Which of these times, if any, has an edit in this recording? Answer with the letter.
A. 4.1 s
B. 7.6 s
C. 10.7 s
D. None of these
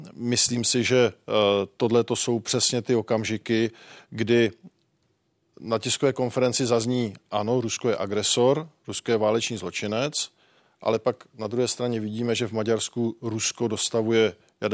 D